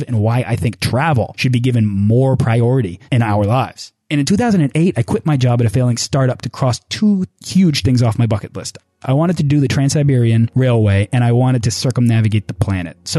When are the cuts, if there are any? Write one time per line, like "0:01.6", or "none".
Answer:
none

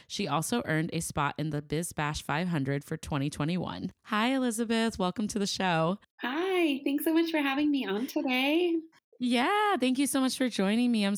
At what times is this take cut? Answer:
0:04.0

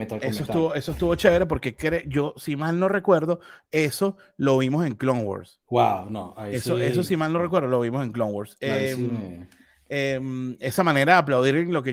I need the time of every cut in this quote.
0:05.6

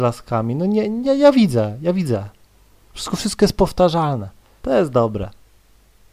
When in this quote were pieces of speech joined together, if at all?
0:04.6

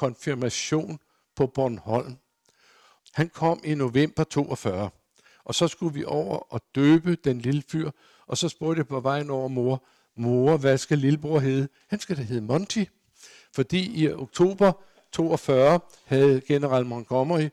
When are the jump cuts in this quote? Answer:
0:03.0

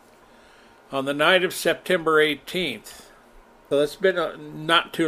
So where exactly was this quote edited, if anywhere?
0:03.7

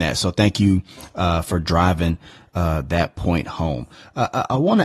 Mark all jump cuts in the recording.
none

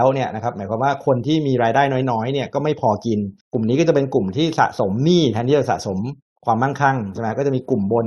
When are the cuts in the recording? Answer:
0:03.4

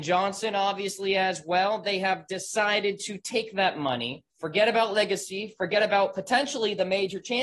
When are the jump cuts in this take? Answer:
0:04.3

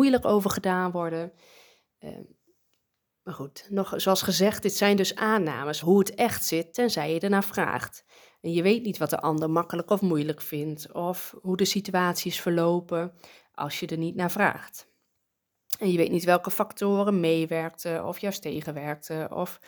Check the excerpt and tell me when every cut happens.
0:05.8

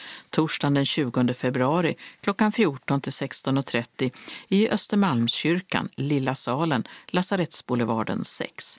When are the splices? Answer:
none

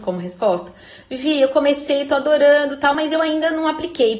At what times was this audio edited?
none

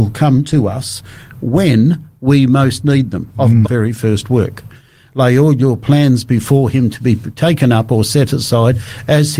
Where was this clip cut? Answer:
0:03.6

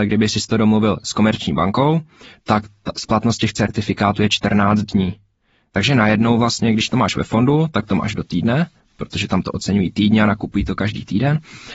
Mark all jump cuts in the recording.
none

